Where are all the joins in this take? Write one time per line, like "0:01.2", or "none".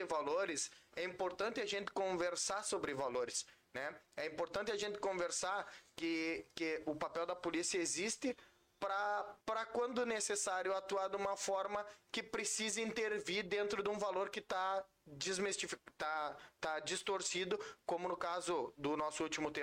0:09.4